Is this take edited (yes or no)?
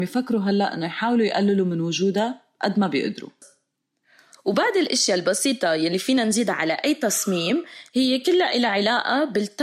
no